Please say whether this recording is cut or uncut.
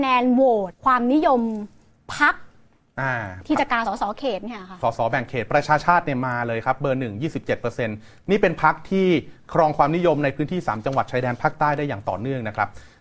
uncut